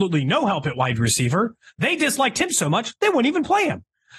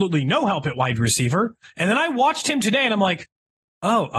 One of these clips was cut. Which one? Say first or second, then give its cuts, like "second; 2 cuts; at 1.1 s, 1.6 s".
second; 1 cut; at 1.6 s